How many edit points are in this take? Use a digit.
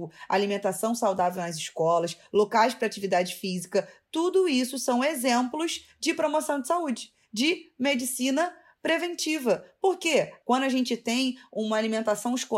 1